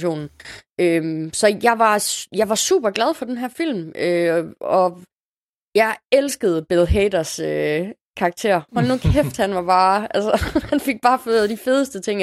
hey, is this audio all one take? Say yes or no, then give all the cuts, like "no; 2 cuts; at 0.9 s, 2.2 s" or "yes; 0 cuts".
yes; 0 cuts